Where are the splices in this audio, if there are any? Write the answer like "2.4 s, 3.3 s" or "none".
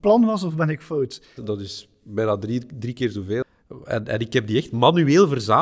1.4 s